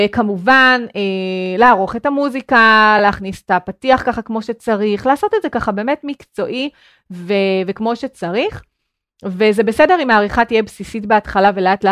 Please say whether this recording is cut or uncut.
uncut